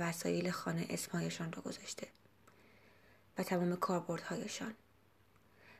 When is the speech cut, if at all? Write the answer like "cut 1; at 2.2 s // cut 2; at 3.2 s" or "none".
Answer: none